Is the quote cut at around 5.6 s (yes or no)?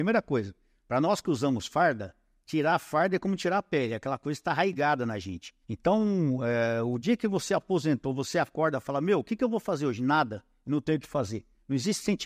yes